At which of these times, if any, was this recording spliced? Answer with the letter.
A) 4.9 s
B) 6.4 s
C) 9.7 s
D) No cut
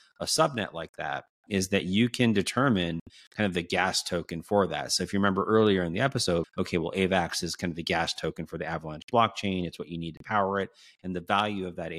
B